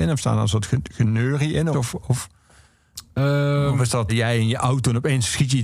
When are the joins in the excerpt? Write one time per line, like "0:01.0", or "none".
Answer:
0:01.7
0:04.1